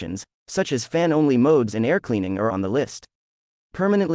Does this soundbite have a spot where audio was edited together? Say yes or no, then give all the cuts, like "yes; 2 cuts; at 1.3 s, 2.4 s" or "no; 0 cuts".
yes; 1 cut; at 2.5 s